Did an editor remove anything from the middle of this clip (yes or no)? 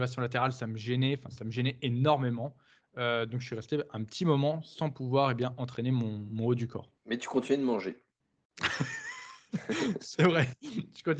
yes